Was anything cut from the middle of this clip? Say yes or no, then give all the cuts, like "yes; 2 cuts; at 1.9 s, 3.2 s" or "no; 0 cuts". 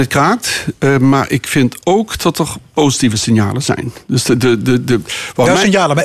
no; 0 cuts